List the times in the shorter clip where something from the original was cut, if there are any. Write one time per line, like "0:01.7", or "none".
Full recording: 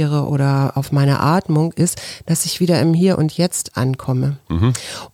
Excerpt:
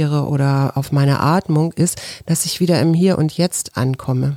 none